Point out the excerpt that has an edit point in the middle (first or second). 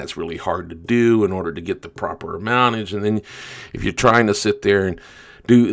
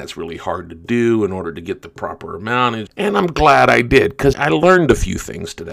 second